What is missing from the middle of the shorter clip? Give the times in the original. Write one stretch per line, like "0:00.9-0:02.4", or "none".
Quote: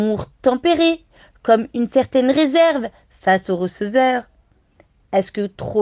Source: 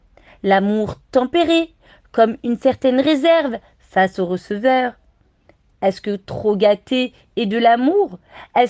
none